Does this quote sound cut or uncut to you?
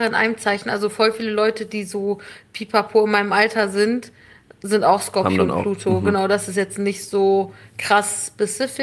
uncut